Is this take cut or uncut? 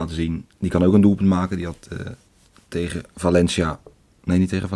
uncut